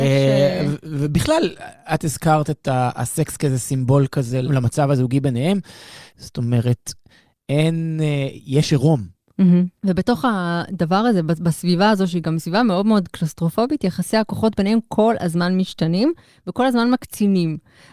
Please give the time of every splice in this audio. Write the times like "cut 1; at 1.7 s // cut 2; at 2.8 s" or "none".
cut 1; at 6.1 s // cut 2; at 9.8 s